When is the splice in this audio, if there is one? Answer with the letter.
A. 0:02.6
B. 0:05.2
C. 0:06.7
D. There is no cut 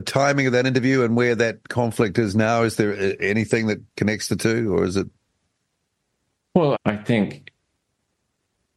C